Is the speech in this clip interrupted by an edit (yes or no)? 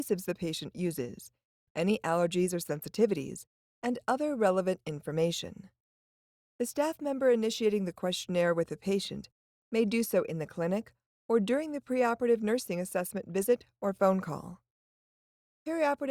no